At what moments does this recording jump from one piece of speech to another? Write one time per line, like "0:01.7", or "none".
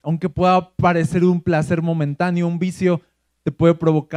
none